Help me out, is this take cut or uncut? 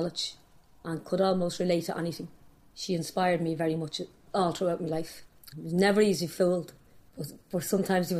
cut